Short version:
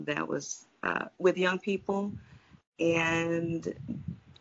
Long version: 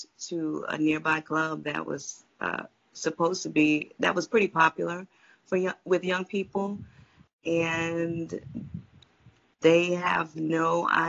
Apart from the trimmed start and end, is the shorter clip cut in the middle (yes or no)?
yes